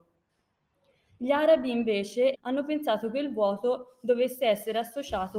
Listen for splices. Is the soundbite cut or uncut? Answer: cut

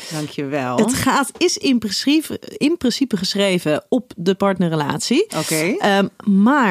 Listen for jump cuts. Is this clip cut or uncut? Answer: uncut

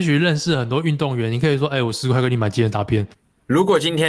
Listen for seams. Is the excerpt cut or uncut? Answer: cut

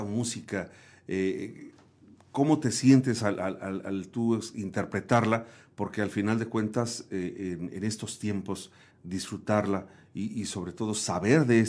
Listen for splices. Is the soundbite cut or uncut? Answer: cut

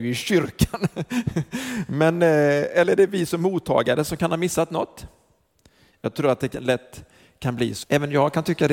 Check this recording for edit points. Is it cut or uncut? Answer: cut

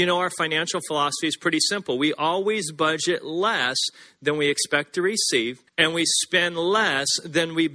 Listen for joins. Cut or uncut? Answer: cut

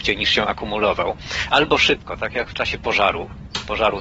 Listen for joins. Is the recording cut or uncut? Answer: uncut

